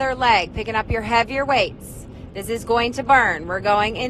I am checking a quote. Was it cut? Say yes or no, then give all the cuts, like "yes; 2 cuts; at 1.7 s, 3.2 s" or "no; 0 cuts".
no; 0 cuts